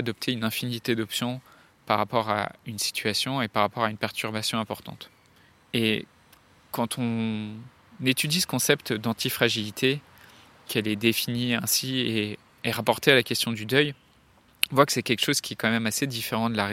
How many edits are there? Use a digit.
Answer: 0